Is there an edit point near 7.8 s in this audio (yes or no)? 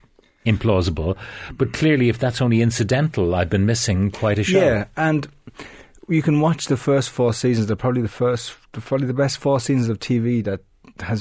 no